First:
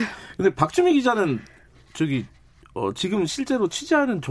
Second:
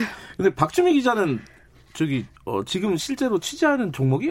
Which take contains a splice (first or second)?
second